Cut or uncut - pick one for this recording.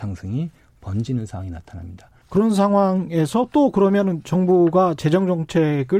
cut